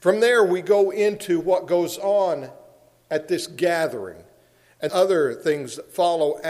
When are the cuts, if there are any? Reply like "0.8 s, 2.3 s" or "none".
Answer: 4.9 s